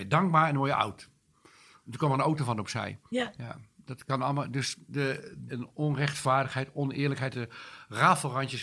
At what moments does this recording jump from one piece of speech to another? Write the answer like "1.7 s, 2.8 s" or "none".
3.1 s, 5.5 s, 7.3 s